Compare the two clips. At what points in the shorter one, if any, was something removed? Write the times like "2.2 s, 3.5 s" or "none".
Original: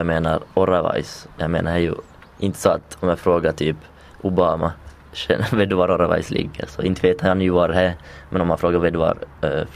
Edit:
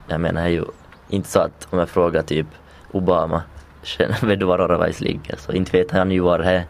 none

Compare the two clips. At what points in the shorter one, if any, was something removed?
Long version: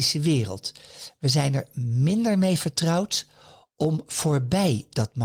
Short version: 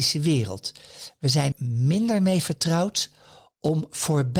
1.5 s

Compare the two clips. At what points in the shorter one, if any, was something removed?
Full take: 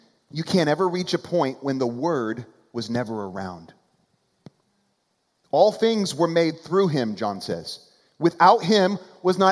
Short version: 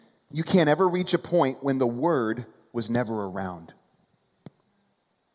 none

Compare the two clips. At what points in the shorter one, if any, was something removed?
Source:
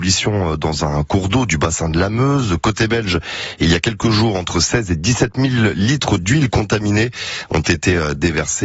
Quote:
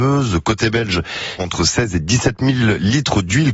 1.4 s

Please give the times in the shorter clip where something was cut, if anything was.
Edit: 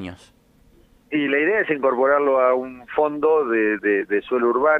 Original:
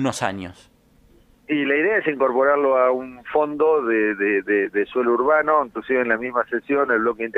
3.8 s

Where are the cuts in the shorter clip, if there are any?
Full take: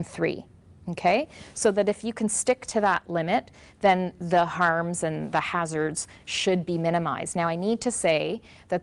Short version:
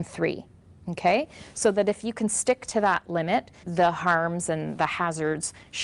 3.6 s

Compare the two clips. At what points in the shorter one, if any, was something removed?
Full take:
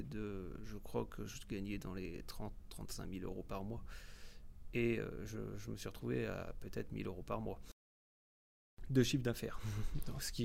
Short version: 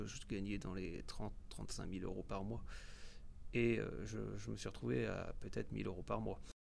none

